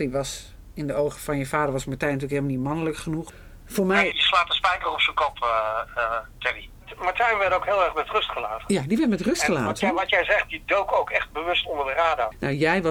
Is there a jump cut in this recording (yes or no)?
yes